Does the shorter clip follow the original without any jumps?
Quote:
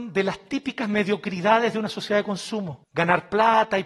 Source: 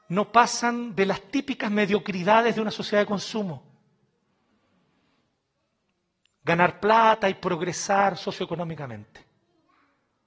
no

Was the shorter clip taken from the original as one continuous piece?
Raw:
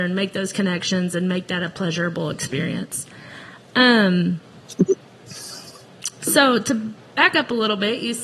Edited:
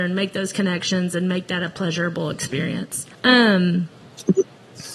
no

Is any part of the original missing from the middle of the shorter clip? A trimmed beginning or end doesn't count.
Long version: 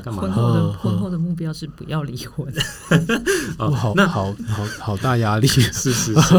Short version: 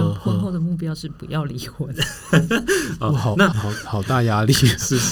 yes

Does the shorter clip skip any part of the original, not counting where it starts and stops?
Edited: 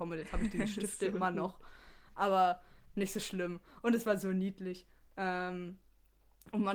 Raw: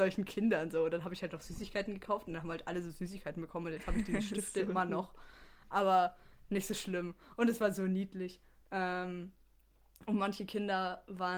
no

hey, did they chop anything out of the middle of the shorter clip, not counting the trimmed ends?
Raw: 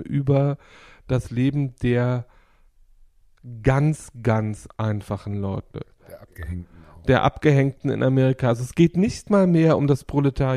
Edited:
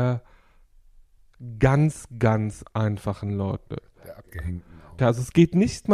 yes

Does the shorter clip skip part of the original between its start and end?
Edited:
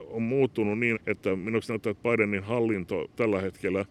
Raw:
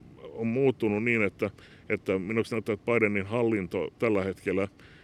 yes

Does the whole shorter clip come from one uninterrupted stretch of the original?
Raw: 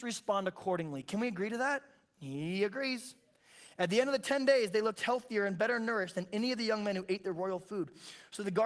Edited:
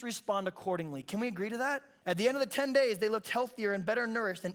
no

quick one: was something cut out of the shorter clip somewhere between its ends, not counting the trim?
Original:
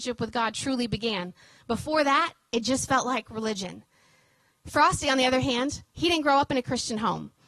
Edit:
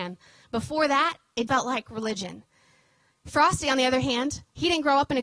yes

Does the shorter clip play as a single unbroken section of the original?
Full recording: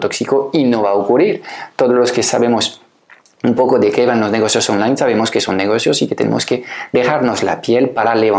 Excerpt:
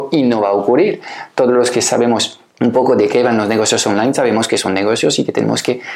no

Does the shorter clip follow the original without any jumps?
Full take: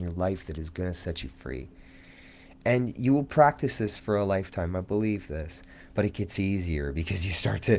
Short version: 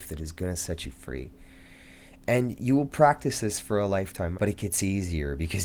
no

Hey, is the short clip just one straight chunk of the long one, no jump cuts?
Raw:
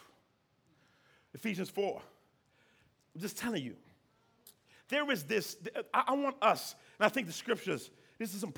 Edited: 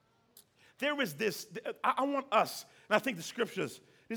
yes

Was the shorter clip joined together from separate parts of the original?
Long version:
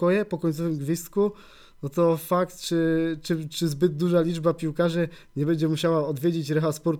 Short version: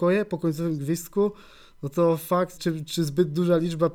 yes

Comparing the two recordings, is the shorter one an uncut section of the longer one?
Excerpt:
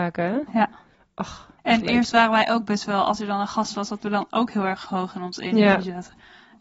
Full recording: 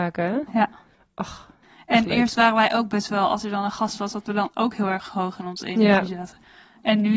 no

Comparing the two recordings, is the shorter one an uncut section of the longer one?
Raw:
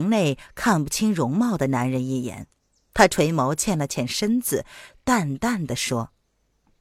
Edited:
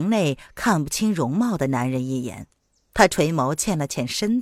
yes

